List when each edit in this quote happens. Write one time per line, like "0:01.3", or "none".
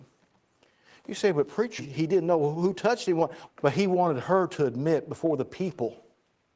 0:01.8
0:03.5